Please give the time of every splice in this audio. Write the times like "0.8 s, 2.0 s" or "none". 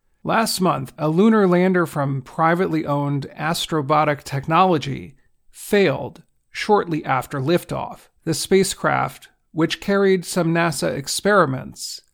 1.0 s, 8.2 s

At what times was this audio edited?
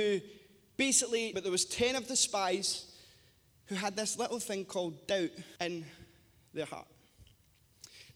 1.3 s, 5.6 s

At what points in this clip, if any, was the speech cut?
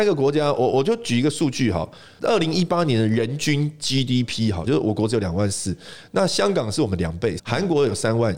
4.7 s, 7.4 s

